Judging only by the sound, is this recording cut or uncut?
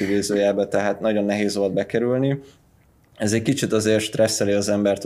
uncut